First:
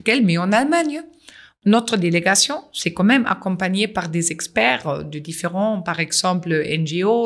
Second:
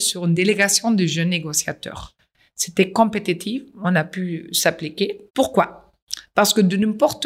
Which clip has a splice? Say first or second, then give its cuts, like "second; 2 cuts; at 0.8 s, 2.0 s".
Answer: second; 1 cut; at 5.3 s